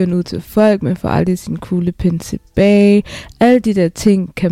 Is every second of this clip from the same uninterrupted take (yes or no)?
yes